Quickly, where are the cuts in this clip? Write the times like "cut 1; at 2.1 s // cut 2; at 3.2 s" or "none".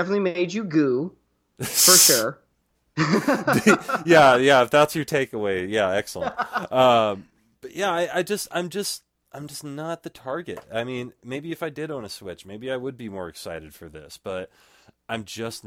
none